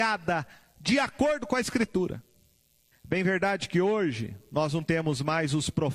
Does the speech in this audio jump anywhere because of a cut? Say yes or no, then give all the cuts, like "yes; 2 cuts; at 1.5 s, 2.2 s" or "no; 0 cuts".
yes; 1 cut; at 2.9 s